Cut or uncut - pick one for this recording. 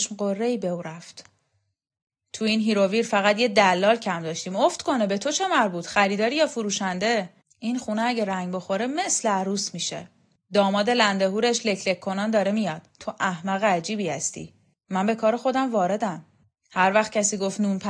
cut